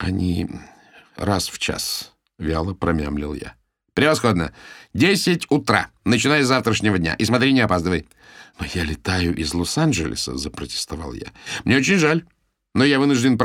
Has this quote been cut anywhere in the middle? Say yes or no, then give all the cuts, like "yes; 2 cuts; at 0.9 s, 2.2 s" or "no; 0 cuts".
yes; 1 cut; at 8.5 s